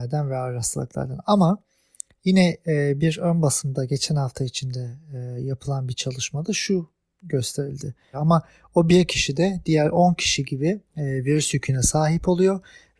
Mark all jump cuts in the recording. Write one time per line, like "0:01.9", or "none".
0:08.1
0:10.9